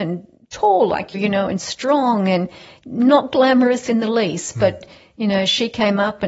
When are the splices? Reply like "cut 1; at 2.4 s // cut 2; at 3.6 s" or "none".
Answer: cut 1; at 1.1 s